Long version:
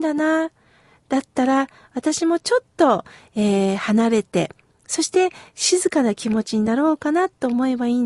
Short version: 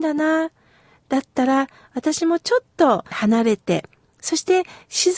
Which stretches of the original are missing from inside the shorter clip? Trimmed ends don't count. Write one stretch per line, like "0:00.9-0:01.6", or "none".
0:03.1-0:03.8